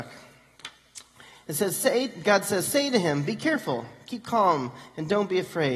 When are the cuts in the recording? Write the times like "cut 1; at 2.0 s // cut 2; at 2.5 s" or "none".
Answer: none